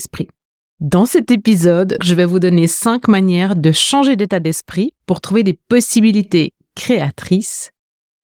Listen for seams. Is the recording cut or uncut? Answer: cut